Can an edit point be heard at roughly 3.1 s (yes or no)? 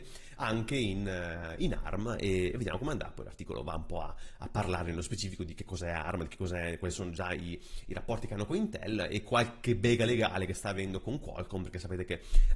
no